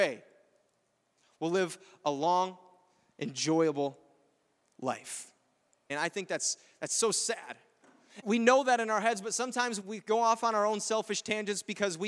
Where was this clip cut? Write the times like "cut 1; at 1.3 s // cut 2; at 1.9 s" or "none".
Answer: cut 1; at 5.9 s // cut 2; at 8.2 s // cut 3; at 9.8 s